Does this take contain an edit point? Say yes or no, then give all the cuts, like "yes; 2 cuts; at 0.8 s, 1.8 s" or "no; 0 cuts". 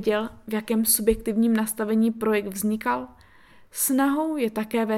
no; 0 cuts